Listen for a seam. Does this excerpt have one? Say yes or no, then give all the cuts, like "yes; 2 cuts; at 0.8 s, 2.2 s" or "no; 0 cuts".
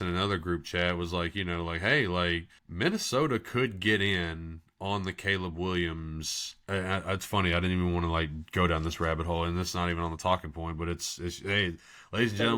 yes; 1 cut; at 2.6 s